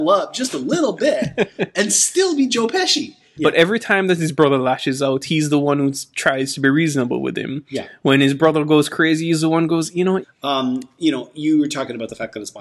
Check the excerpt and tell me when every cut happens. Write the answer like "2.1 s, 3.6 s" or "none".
3.4 s, 10.2 s